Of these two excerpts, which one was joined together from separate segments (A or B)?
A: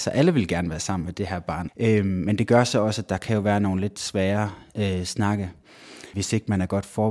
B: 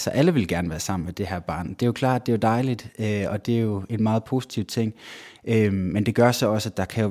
A